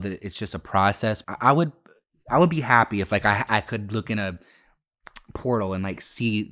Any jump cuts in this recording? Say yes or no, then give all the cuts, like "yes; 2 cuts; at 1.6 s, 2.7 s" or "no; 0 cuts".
yes; 1 cut; at 1.2 s